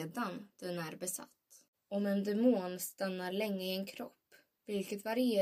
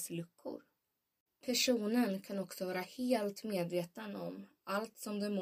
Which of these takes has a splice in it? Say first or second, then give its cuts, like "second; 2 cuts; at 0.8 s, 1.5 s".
first; 1 cut; at 1.7 s